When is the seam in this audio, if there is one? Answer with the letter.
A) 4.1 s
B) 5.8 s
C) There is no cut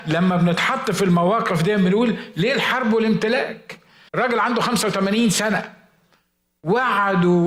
A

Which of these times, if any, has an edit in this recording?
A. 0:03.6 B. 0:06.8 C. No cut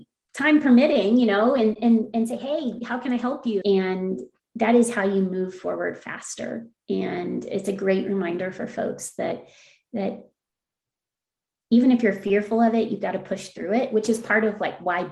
A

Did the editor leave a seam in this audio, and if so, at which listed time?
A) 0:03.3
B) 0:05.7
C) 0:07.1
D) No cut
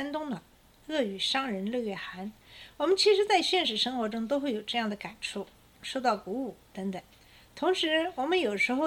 B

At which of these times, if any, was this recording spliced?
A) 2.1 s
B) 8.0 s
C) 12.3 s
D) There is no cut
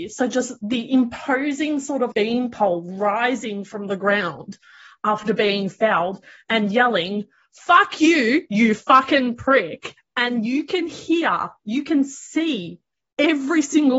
A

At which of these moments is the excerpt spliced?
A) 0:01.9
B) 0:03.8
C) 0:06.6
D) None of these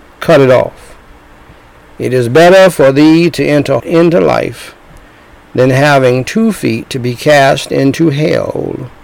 B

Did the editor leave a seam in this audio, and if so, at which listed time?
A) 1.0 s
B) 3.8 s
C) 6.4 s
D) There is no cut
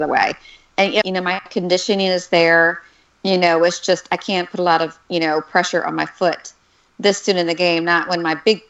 A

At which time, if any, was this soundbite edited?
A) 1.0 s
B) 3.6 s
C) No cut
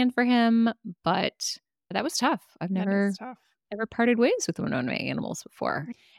C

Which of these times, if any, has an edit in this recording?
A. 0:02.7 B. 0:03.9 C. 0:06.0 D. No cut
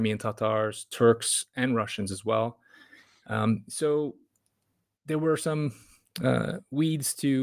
D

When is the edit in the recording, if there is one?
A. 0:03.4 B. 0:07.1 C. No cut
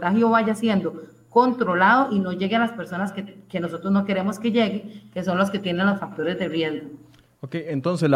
C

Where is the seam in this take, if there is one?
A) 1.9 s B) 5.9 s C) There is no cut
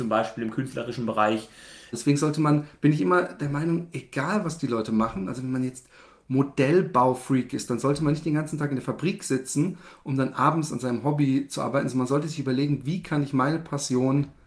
A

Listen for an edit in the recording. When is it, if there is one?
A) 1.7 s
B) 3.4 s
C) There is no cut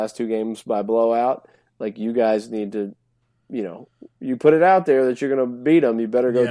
C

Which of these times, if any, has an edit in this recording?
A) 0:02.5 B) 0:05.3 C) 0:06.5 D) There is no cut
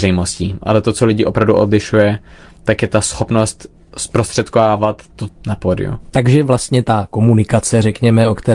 B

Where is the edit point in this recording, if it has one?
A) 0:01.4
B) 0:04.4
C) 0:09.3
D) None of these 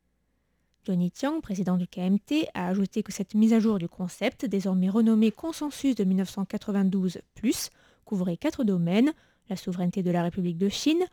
D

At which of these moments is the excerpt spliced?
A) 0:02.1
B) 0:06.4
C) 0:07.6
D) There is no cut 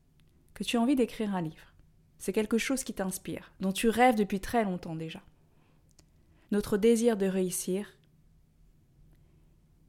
B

